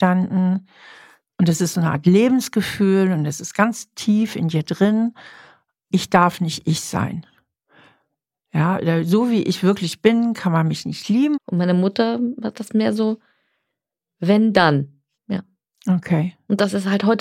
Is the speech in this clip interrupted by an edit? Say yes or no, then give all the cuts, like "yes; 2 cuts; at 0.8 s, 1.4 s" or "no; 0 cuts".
yes; 2 cuts; at 11.3 s, 15.1 s